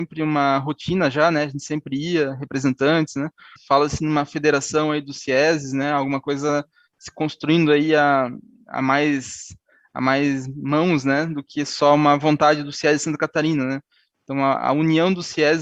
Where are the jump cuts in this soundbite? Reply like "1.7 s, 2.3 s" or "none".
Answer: 3.6 s